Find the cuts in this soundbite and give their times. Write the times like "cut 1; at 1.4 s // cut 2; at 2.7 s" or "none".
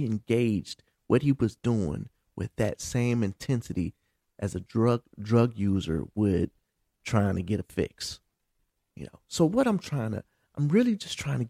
none